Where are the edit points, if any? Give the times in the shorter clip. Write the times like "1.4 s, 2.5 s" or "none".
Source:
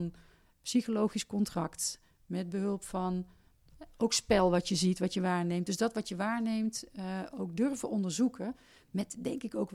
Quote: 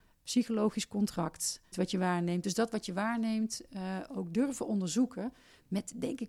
1.7 s